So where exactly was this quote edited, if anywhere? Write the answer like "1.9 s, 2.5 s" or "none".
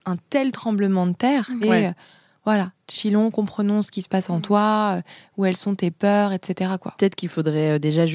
1.6 s